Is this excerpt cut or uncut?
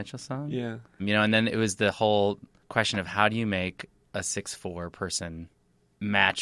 cut